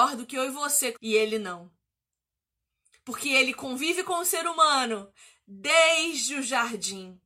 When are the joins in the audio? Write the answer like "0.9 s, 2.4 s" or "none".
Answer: 0.9 s